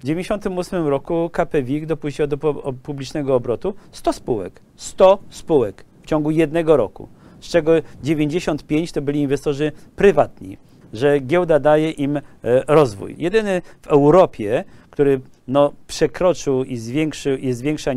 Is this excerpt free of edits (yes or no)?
no